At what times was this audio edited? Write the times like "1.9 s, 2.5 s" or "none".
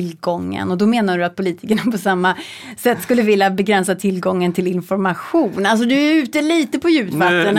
none